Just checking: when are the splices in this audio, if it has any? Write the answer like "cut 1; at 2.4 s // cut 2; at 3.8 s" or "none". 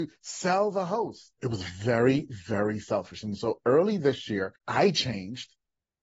cut 1; at 1.4 s // cut 2; at 4.6 s